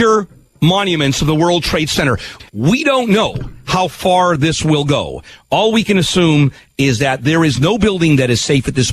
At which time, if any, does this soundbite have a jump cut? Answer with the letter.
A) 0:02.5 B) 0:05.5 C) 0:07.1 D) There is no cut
D